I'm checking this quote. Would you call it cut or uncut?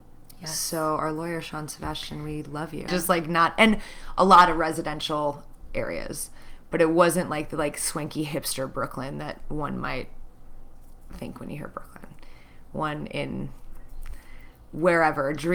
cut